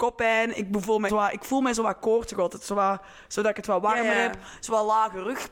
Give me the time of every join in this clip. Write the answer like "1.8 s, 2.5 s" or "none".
1.1 s